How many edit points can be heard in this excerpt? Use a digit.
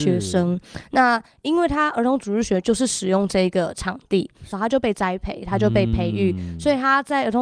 1